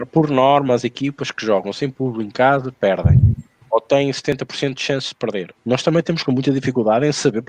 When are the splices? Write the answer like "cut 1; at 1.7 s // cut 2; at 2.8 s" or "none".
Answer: cut 1; at 5.5 s